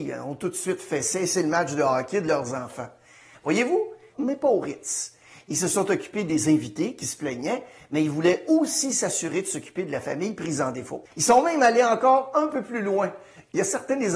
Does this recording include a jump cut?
yes; 2 cuts; at 4.1 s, 11.1 s

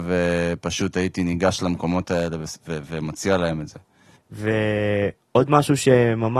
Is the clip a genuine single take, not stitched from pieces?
no; 1 cut; at 4.2 s

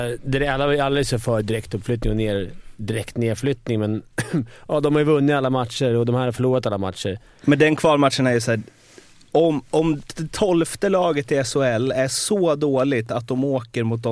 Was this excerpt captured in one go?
no; 1 cut; at 7.4 s

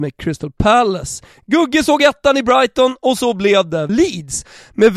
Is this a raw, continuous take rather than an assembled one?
no; 1 cut; at 3.9 s

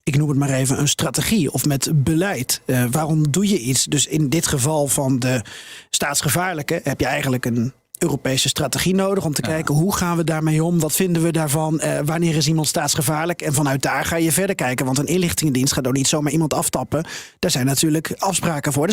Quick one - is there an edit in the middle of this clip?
no; 0 cuts

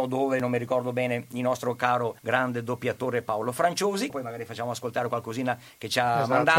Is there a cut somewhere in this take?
yes; 2 cuts; at 2.2 s, 4.1 s

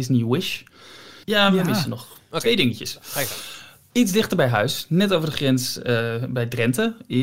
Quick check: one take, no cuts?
no; 1 cut; at 1.2 s

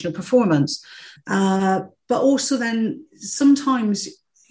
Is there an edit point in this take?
yes; 1 cut; at 1.2 s

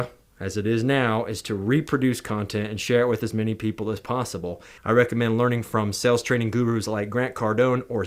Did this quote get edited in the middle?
yes; 1 cut; at 4.8 s

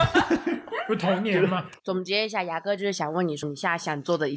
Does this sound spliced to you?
yes; 2 cuts; at 1.8 s, 3.4 s

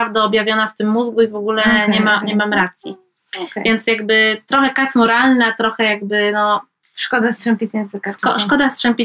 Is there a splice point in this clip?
no; 0 cuts

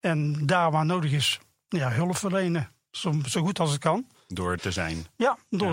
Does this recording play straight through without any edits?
no; 2 cuts; at 3.3 s, 4.6 s

